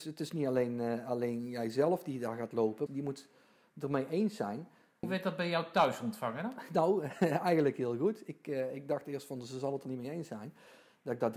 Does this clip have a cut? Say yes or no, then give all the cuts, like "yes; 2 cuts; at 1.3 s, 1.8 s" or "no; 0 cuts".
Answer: yes; 2 cuts; at 2.9 s, 5.0 s